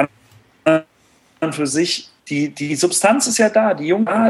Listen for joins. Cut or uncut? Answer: cut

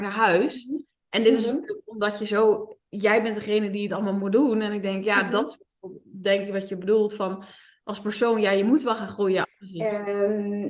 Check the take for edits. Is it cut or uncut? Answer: cut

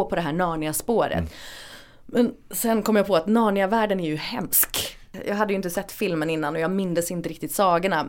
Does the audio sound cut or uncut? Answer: uncut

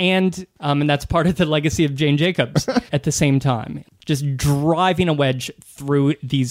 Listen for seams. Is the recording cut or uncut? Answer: cut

